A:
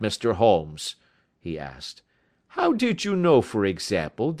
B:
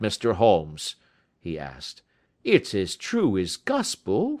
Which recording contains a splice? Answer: B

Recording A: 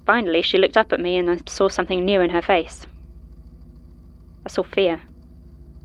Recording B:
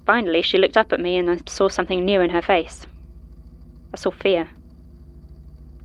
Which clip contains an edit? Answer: B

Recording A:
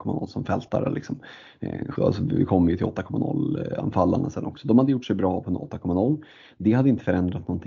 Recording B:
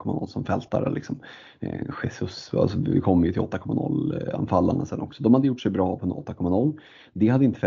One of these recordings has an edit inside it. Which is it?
A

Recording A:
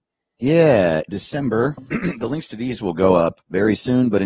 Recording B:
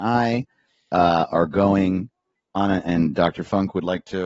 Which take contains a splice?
A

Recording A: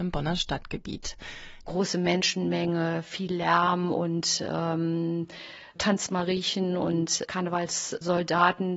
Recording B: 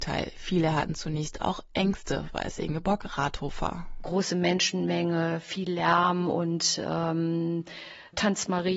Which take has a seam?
A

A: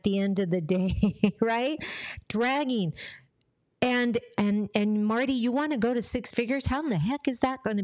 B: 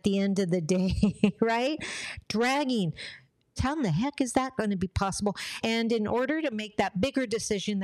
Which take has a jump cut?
B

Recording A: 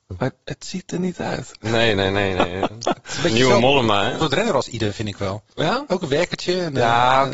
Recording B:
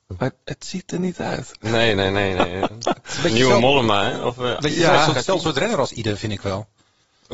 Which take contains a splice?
A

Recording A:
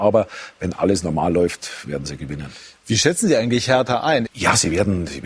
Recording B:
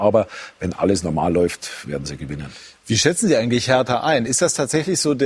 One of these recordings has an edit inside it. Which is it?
A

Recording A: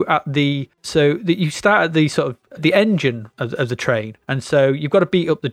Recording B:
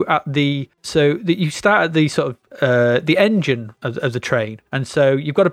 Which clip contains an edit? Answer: A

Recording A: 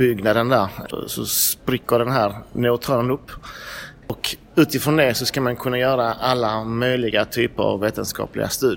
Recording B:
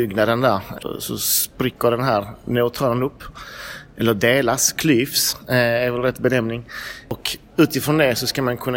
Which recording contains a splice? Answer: A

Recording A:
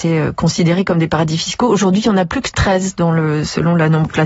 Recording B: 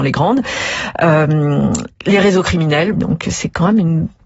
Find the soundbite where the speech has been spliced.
B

